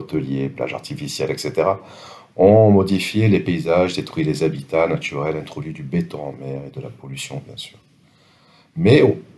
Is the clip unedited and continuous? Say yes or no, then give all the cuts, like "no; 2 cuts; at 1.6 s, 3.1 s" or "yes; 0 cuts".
yes; 0 cuts